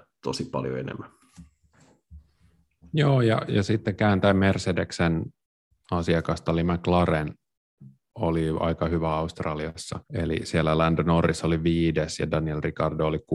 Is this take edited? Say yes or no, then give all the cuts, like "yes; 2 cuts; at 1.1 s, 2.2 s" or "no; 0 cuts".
yes; 2 cuts; at 3.5 s, 10.0 s